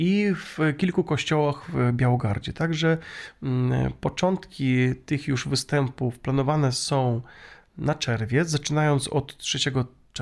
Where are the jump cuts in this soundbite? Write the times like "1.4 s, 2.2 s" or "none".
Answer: none

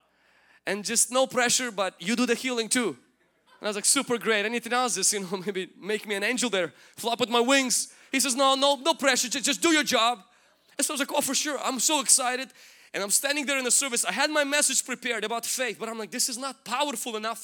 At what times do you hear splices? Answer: none

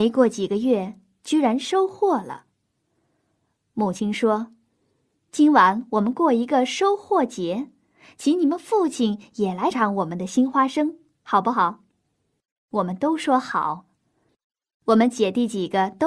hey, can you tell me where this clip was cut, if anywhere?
9.7 s, 14.3 s

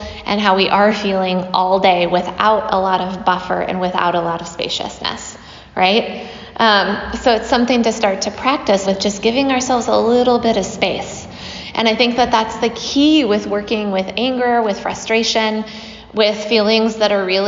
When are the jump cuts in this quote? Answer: 8.9 s

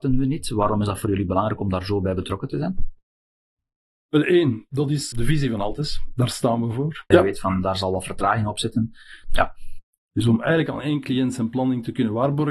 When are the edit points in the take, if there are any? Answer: 5.1 s, 7.1 s, 9.2 s

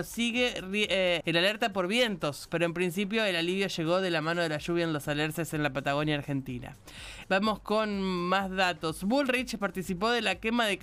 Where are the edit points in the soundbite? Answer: 1.2 s, 2.5 s, 7.2 s

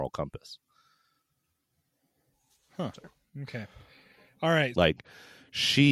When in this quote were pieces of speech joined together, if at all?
4.7 s

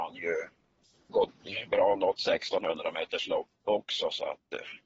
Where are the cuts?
1.1 s

